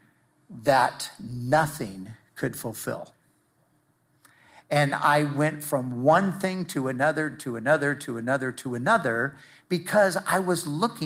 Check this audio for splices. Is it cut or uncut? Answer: uncut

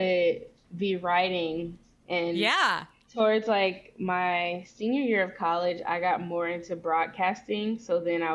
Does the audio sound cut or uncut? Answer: cut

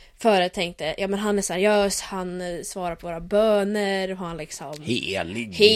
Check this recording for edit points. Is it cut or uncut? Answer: uncut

